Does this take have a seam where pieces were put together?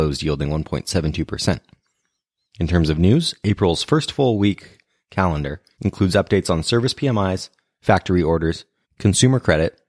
yes; 2 cuts; at 5.7 s, 8.8 s

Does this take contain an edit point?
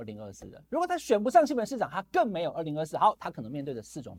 yes; 1 cut; at 3.2 s

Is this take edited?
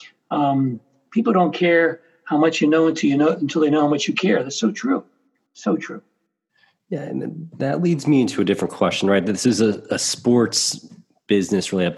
no; 0 cuts

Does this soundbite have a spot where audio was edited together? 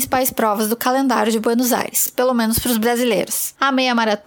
no; 0 cuts

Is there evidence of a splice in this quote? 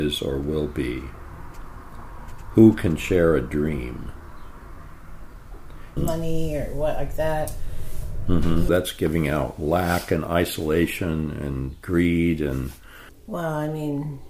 yes; 3 cuts; at 6.0 s, 8.7 s, 13.1 s

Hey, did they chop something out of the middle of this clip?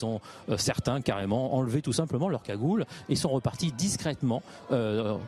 no; 0 cuts

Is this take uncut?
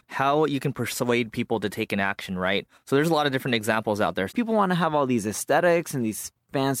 no; 1 cut; at 4.3 s

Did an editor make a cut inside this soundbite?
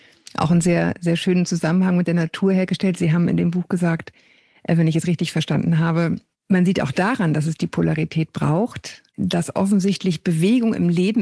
no; 0 cuts

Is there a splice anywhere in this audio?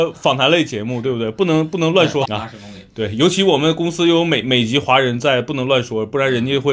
yes; 1 cut; at 2.2 s

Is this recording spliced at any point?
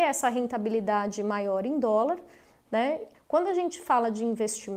yes; 1 cut; at 3.1 s

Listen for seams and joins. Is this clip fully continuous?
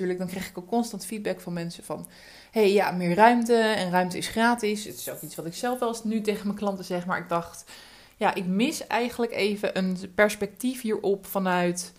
yes; 0 cuts

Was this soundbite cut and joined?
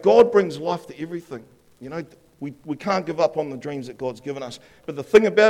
no; 0 cuts

